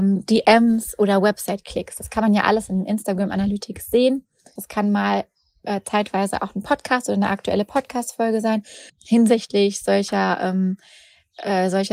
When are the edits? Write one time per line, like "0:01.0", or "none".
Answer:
0:04.6
0:08.9